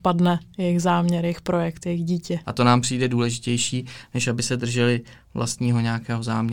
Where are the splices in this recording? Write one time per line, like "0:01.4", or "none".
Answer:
0:02.4